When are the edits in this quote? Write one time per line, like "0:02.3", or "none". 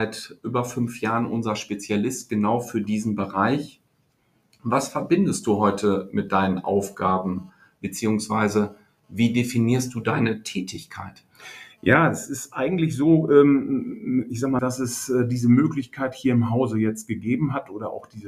0:14.6